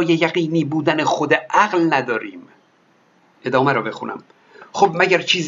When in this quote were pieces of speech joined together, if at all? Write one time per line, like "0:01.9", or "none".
none